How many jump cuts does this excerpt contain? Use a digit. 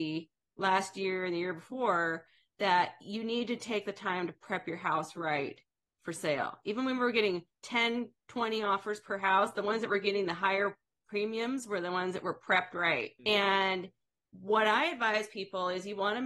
1